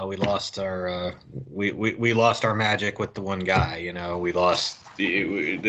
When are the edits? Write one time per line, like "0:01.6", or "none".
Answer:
none